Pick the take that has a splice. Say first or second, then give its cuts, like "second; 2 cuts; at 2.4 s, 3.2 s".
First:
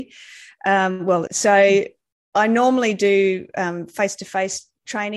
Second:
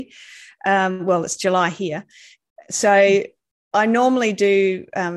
first; 1 cut; at 1.3 s